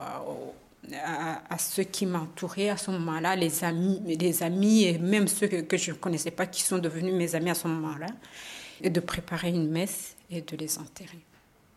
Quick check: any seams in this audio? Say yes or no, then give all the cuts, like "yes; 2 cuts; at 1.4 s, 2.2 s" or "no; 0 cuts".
yes; 2 cuts; at 5.5 s, 8.8 s